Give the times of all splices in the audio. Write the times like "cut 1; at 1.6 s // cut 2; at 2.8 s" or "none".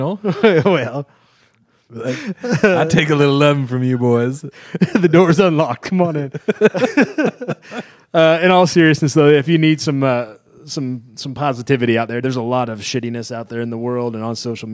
cut 1; at 1.9 s // cut 2; at 12.2 s